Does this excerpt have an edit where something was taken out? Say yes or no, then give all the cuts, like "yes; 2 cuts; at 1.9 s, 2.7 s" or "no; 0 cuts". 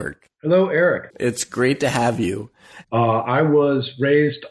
yes; 2 cuts; at 1.1 s, 2.8 s